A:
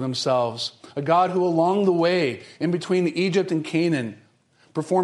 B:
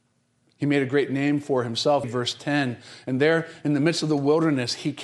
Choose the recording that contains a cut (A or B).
B